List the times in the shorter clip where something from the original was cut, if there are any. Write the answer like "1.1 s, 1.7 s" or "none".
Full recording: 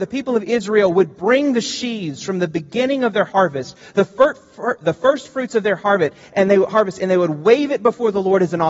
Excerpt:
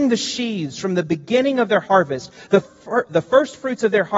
2.6 s